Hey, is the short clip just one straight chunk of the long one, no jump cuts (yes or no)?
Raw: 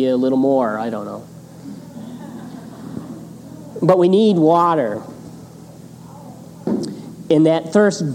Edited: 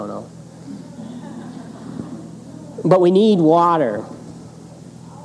yes